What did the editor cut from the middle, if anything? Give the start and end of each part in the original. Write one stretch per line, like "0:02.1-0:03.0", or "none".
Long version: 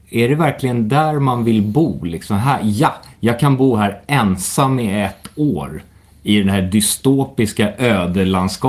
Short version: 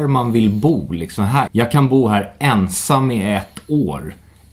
0:02.6-0:03.2